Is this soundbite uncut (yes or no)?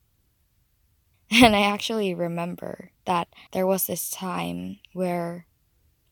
no